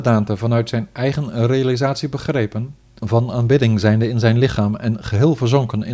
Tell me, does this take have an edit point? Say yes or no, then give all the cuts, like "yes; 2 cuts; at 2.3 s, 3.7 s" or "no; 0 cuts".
yes; 1 cut; at 3.0 s